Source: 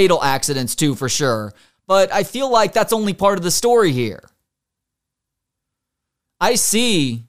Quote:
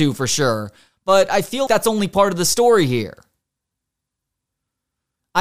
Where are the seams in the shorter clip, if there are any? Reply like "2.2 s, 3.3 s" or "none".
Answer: 1.7 s